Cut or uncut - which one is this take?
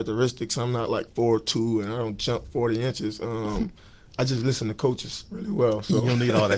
uncut